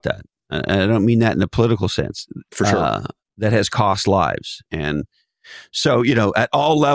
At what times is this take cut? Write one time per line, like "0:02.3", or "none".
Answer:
0:02.5
0:04.7